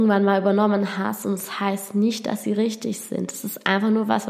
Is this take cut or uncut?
uncut